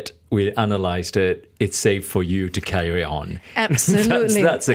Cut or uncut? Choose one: uncut